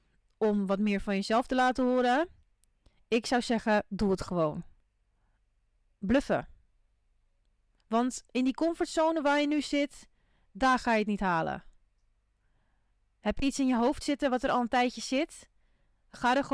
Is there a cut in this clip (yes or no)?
no